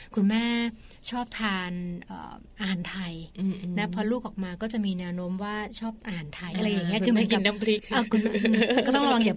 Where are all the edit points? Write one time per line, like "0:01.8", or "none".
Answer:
none